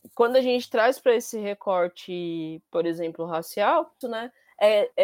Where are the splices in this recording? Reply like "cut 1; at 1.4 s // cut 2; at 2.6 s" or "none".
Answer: cut 1; at 4.0 s